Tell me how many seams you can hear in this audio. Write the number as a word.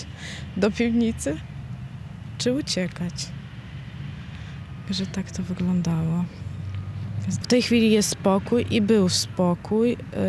one